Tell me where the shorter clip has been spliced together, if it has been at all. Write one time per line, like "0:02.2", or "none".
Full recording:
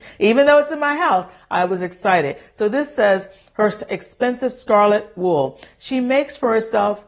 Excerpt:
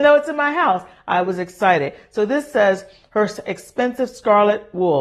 none